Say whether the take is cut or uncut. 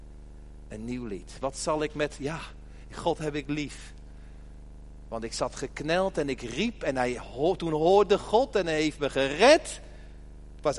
uncut